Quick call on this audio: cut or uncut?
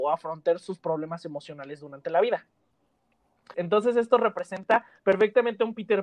cut